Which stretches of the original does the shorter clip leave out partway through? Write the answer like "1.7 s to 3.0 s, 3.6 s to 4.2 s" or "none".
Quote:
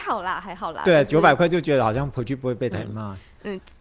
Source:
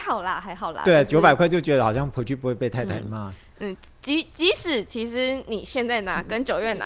2.7 s to 2.9 s